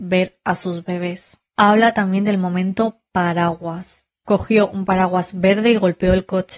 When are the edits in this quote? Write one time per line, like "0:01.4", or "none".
none